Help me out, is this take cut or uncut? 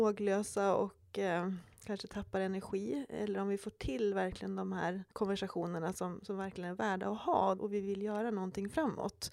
cut